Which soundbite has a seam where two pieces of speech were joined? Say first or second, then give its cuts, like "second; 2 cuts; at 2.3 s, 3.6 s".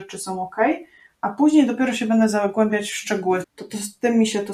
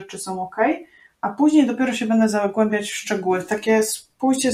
first; 1 cut; at 3.4 s